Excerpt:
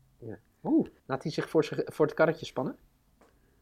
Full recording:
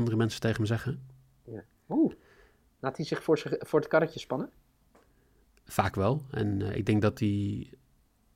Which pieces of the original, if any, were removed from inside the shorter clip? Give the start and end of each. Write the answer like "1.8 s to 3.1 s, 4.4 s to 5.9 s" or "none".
2.2 s to 2.7 s